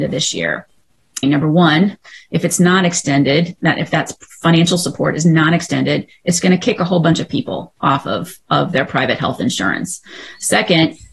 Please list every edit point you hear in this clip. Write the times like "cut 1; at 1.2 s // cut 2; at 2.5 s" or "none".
cut 1; at 1.2 s